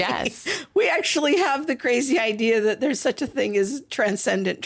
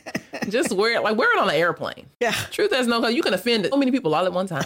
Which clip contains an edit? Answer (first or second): second